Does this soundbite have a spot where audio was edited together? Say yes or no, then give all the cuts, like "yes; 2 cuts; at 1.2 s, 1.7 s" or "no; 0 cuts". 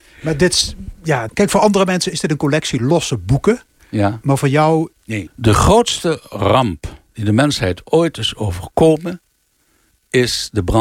yes; 3 cuts; at 1.3 s, 5.3 s, 7.1 s